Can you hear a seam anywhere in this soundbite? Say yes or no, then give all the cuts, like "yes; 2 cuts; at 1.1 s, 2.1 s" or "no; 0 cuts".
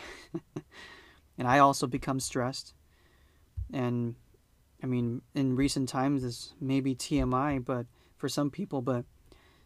no; 0 cuts